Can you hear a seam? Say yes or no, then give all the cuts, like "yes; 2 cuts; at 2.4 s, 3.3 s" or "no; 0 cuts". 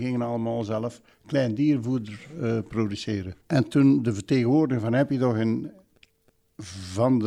yes; 1 cut; at 3.4 s